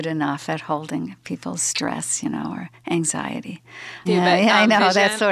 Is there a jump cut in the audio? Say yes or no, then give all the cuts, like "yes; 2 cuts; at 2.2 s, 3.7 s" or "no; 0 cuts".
yes; 1 cut; at 4.1 s